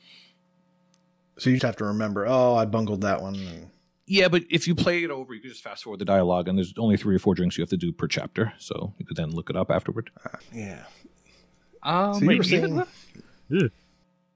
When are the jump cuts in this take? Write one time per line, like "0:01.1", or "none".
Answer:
0:01.6
0:10.4